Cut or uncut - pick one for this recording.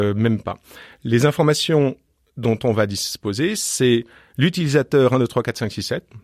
uncut